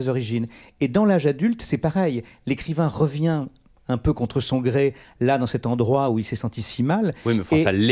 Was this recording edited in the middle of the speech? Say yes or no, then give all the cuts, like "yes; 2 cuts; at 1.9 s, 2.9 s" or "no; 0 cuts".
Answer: no; 0 cuts